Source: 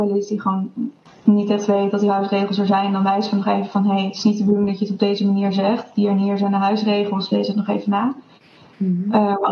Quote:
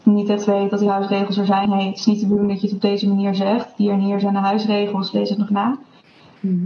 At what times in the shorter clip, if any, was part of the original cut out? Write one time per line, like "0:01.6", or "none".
0:01.7
0:05.5